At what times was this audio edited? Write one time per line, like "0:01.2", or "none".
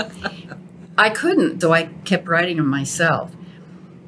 0:01.6